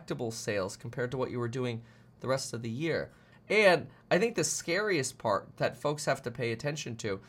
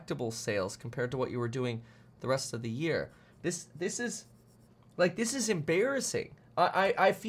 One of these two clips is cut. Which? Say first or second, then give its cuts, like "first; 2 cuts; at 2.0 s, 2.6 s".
first; 1 cut; at 3.3 s